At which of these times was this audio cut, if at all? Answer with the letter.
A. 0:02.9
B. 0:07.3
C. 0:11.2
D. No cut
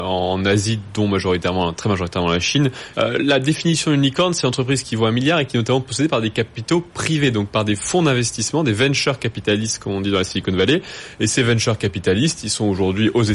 A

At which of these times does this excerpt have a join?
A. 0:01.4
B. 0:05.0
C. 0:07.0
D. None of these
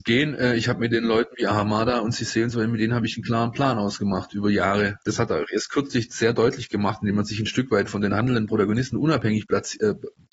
B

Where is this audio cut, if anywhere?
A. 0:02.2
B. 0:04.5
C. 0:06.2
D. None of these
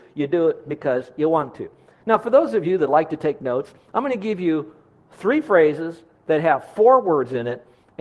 D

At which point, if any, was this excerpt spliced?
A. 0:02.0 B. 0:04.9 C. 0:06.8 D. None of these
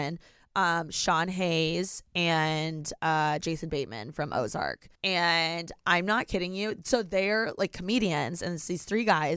B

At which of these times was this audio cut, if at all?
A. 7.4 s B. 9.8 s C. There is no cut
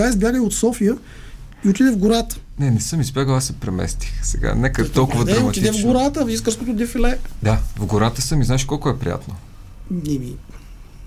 C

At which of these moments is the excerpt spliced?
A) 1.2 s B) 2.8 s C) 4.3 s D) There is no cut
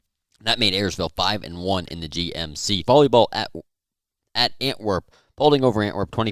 B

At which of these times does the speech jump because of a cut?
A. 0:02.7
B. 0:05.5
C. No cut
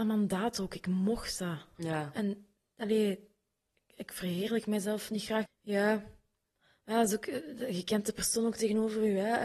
B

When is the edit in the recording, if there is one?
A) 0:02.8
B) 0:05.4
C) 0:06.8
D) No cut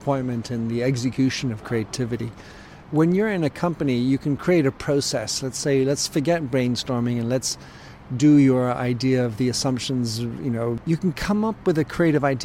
D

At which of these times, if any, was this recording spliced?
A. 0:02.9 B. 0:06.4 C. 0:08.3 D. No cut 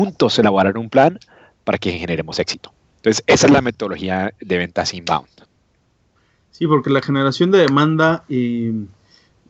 D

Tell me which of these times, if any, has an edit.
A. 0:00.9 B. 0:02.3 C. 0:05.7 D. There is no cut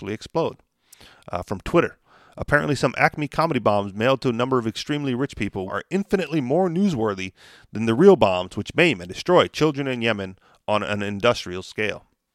C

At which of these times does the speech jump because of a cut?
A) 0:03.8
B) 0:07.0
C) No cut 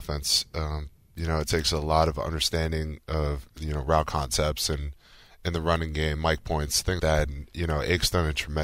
B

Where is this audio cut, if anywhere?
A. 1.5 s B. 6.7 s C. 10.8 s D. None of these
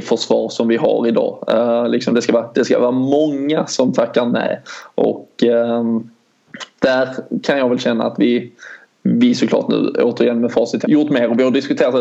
C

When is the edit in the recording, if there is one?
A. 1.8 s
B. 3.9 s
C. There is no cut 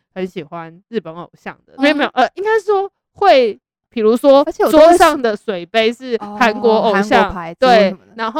A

